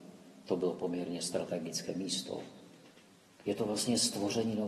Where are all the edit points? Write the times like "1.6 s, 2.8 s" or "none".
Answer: 3.4 s